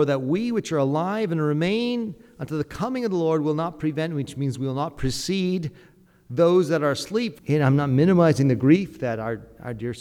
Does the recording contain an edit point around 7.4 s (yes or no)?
yes